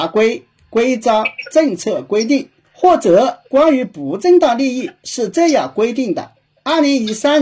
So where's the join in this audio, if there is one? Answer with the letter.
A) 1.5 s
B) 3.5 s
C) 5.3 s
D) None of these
B